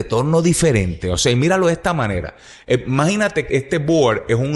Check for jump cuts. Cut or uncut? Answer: cut